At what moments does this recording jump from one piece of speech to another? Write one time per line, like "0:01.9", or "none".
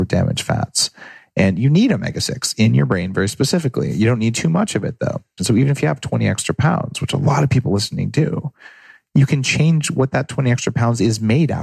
0:05.4

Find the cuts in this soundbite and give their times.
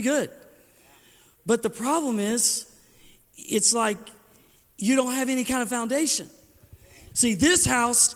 none

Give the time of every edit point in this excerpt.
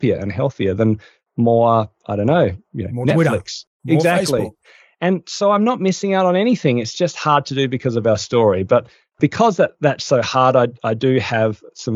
none

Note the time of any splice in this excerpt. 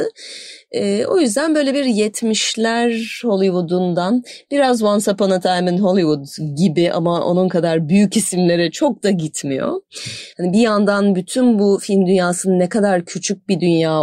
0:10.3

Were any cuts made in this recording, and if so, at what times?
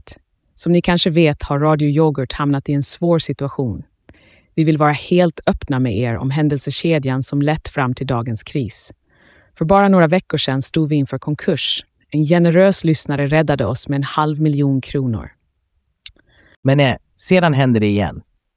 none

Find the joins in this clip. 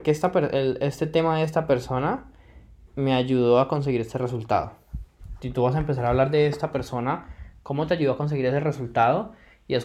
none

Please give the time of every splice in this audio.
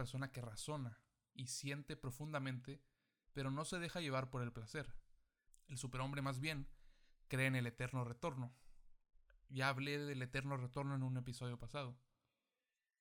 0:05.5

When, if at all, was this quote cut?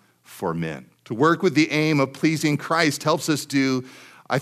0:01.0

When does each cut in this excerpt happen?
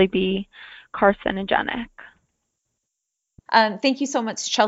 0:03.5

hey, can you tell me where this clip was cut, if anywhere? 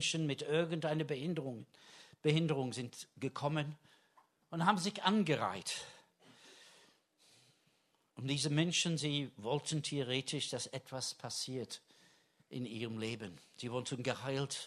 none

